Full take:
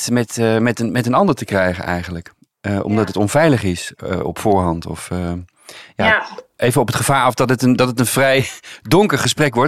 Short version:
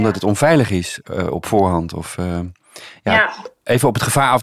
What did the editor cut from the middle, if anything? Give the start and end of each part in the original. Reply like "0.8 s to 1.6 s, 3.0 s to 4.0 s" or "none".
none

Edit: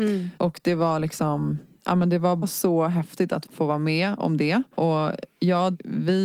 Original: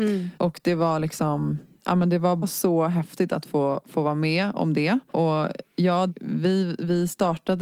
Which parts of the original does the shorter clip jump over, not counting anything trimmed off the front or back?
3.5 s to 3.8 s

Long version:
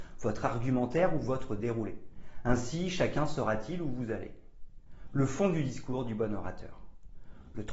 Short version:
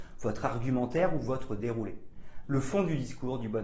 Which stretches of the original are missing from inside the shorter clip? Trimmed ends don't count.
2.4 s to 5.1 s

